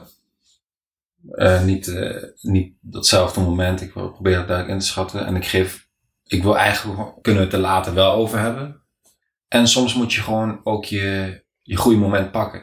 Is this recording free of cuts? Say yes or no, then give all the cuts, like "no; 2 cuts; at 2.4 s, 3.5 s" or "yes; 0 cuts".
no; 1 cut; at 7.2 s